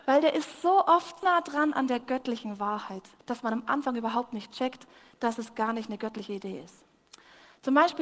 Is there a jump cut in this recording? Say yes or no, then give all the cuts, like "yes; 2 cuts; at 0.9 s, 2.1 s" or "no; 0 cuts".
yes; 2 cuts; at 1.2 s, 3.2 s